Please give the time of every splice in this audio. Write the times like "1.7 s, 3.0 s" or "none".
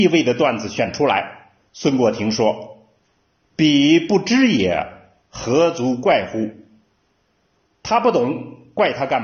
1.7 s